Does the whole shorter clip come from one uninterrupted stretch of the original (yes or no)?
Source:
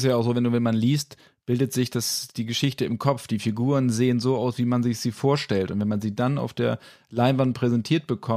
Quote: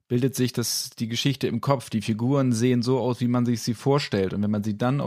yes